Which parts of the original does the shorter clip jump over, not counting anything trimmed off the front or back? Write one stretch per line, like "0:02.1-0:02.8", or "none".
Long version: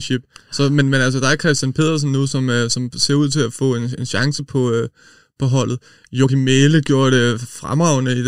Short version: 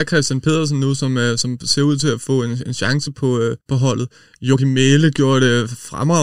0:04.9-0:05.3